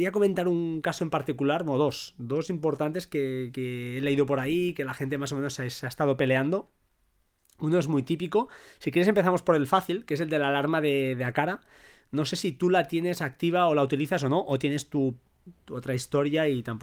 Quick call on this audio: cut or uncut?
uncut